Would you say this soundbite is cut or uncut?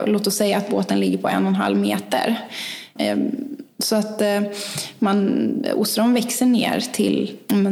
cut